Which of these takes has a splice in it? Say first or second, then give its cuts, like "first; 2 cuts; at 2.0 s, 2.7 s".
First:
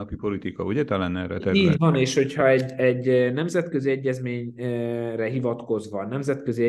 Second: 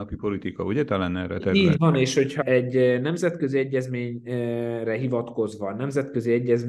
second; 1 cut; at 2.4 s